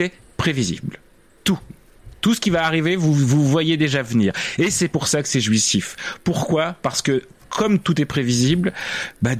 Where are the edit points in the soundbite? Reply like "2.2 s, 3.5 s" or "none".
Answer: none